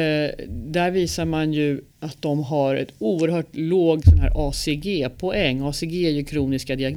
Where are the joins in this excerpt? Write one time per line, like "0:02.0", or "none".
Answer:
0:01.9

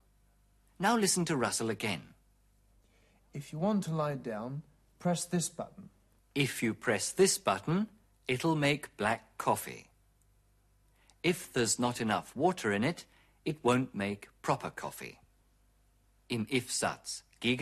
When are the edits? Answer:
0:06.2

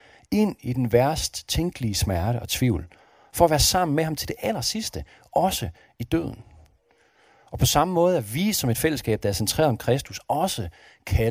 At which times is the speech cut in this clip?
none

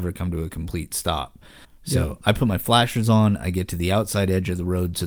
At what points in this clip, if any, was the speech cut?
0:01.6

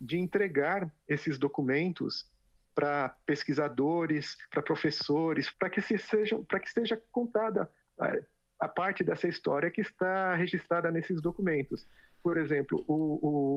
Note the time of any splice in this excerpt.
0:05.5

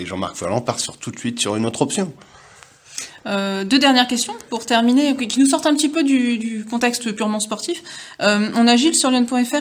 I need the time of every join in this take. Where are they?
none

